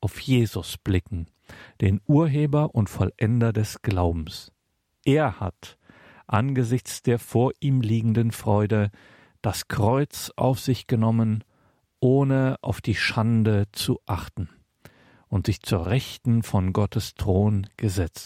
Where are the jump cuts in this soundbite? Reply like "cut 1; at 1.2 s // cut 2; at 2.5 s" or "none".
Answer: none